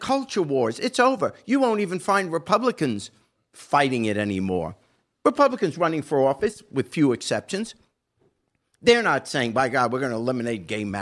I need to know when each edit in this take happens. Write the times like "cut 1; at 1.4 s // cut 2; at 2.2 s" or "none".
none

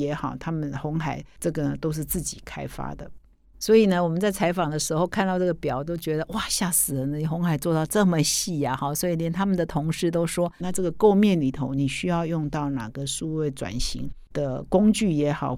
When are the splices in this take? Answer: cut 1; at 10.6 s

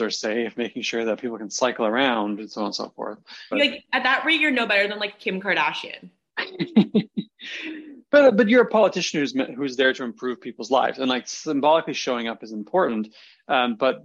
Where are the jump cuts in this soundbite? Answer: cut 1; at 3.5 s

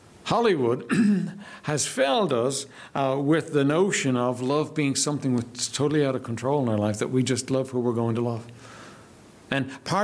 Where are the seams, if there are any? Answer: none

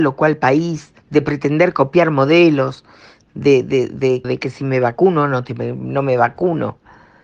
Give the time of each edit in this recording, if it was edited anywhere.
cut 1; at 1.0 s // cut 2; at 4.2 s

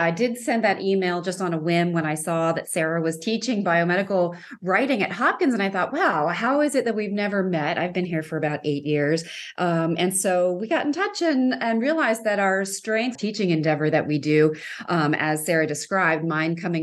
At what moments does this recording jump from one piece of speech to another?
cut 1; at 13.2 s

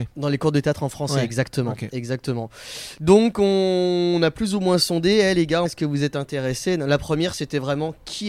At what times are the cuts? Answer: cut 1; at 5.7 s

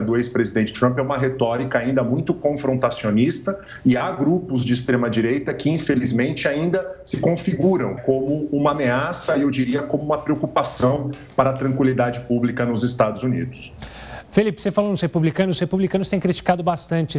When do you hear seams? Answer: cut 1; at 8.0 s

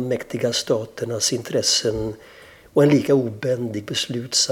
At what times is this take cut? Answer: none

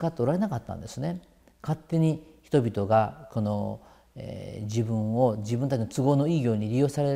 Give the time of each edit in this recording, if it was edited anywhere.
none

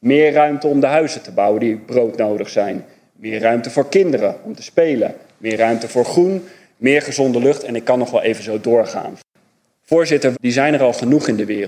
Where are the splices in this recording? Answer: cut 1; at 10.3 s

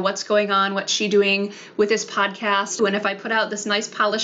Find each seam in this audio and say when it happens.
cut 1; at 2.8 s

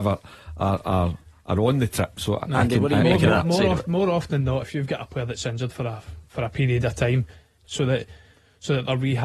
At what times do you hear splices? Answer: cut 1; at 4.6 s // cut 2; at 7.6 s

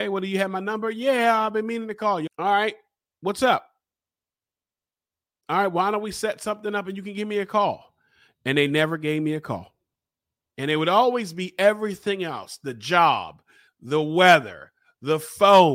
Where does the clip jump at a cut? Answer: cut 1; at 2.3 s // cut 2; at 10.4 s // cut 3; at 13.7 s

